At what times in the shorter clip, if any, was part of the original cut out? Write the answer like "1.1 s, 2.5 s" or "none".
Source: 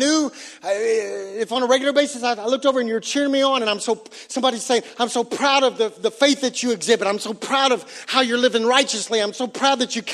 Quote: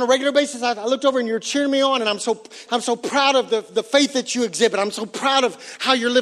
2.7 s